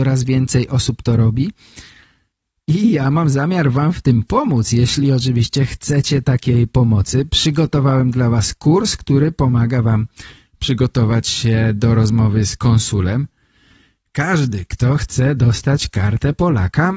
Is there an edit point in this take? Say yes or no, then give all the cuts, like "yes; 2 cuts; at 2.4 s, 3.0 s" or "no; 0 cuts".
no; 0 cuts